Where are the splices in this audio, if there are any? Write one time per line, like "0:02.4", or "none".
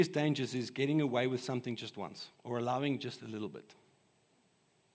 0:02.3